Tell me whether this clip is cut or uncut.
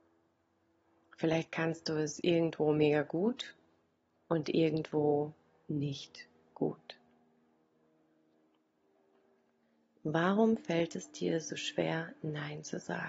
uncut